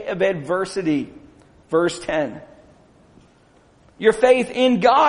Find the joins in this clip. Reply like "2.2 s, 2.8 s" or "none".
3.8 s